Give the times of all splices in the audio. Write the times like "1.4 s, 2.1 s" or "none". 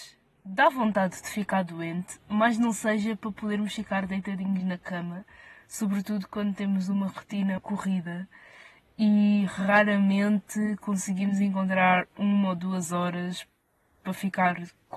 7.6 s